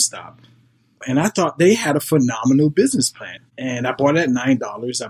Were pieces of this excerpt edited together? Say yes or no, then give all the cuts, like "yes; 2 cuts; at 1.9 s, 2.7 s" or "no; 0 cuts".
yes; 2 cuts; at 1.0 s, 3.4 s